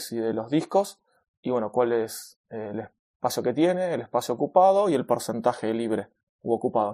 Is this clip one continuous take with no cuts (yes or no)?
yes